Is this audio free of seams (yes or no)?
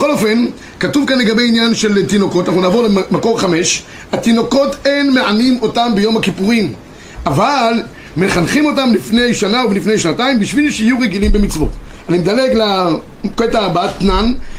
yes